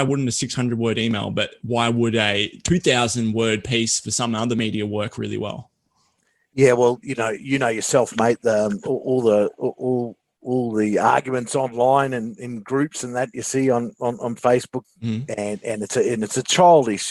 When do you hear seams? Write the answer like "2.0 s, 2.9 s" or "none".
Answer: 14.8 s